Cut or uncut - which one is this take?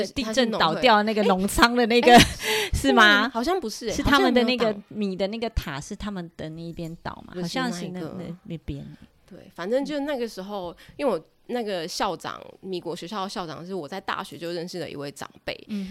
cut